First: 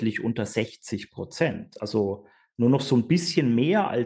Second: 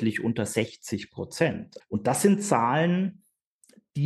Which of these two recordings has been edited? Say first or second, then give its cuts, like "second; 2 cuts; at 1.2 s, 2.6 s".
second; 1 cut; at 1.8 s